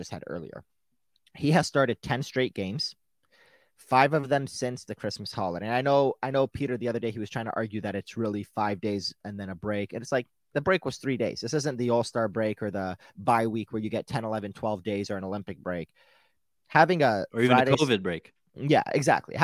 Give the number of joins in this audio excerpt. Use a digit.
0